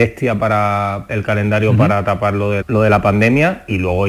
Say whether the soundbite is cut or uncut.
cut